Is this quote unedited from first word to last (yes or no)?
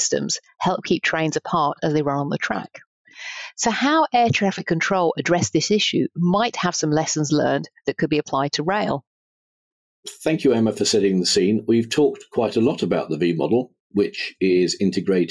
yes